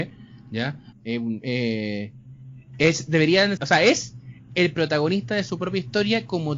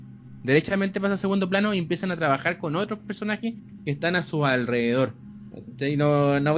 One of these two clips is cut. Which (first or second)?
first